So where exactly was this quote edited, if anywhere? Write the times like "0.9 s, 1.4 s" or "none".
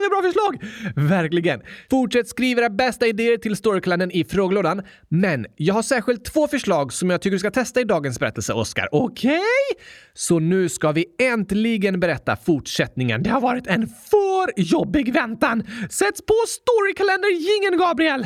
none